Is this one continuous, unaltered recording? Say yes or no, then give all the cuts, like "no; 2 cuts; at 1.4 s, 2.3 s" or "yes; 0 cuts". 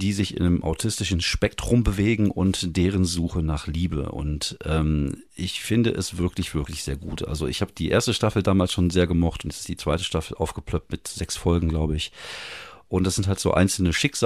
yes; 0 cuts